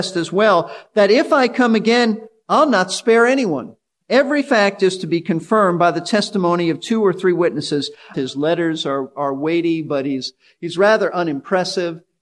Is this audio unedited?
no; 2 cuts; at 4.0 s, 8.1 s

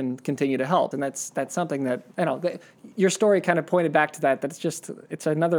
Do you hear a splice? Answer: yes; 2 cuts; at 0.9 s, 2.1 s

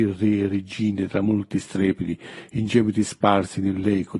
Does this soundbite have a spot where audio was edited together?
no; 0 cuts

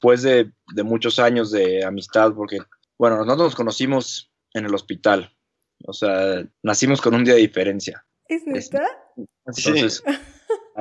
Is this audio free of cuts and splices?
no; 3 cuts; at 4.4 s, 6.5 s, 9.6 s

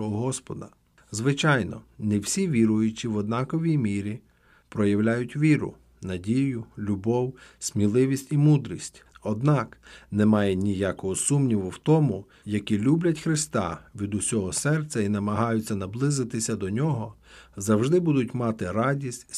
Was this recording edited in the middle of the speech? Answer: yes; 2 cuts; at 9.1 s, 12.4 s

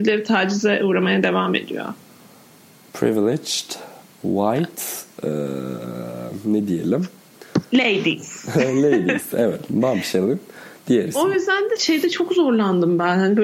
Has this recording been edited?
yes; 1 cut; at 11.8 s

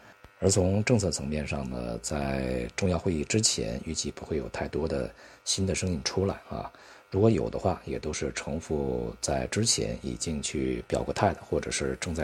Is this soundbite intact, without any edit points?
yes; 0 cuts

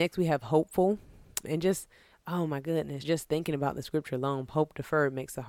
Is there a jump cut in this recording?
yes; 3 cuts; at 1.4 s, 3.0 s, 4.5 s

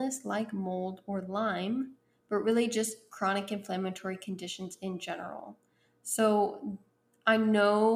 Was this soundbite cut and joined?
no; 0 cuts

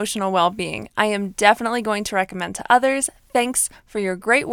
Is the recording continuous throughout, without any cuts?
yes; 0 cuts

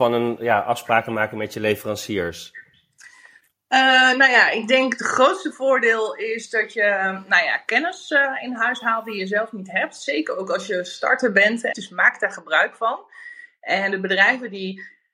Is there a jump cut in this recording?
yes; 1 cut; at 11.7 s

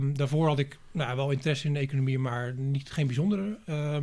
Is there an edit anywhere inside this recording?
no; 0 cuts

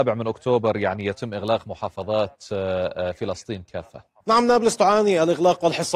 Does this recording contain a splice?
yes; 1 cut; at 4.2 s

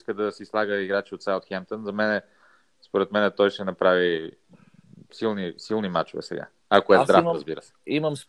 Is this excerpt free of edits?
yes; 0 cuts

